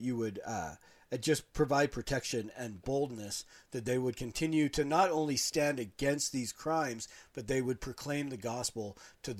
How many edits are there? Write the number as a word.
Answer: zero